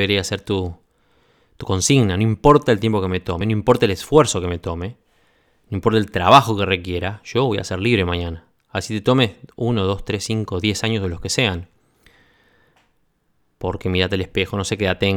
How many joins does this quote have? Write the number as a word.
zero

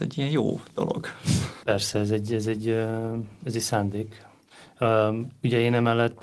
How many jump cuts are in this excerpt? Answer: one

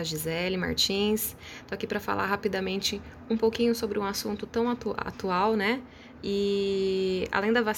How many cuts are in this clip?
one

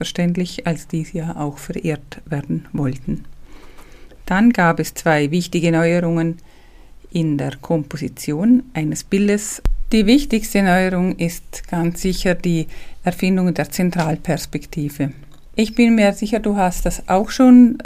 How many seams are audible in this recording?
zero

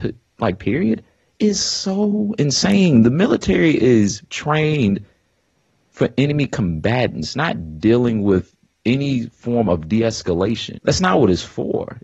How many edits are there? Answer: one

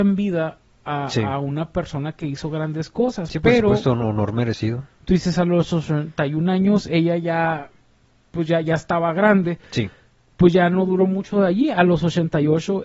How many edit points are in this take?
zero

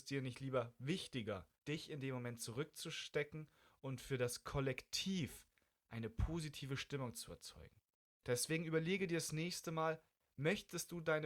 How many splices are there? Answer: two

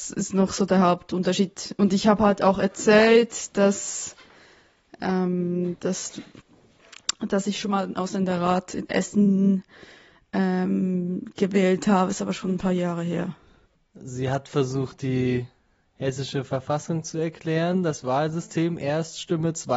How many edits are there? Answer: one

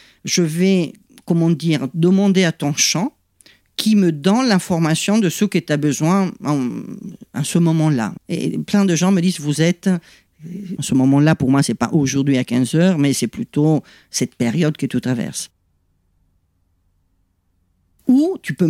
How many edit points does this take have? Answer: two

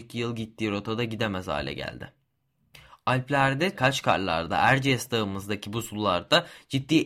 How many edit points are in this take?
one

